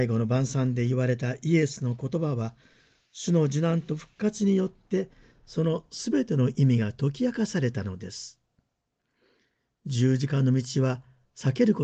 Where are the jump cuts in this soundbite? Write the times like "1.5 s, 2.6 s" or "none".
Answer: none